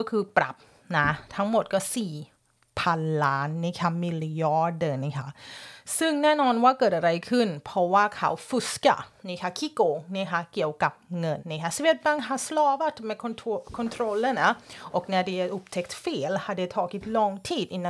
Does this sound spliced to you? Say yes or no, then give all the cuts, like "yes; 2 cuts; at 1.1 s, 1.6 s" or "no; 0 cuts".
yes; 1 cut; at 11.4 s